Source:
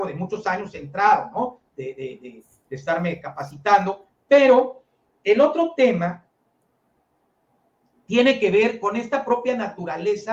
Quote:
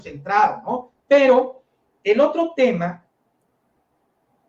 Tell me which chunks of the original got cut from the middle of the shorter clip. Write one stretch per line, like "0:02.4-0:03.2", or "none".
0:01.7-0:04.2